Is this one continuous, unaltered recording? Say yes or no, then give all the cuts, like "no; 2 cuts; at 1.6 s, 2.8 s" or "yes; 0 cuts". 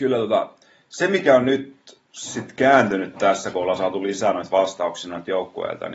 no; 1 cut; at 2.0 s